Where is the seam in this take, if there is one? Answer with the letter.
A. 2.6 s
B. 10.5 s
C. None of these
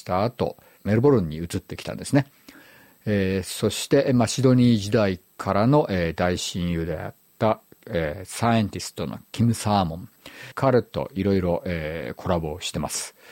C